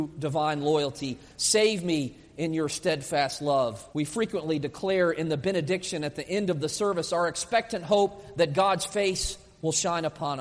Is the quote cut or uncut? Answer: cut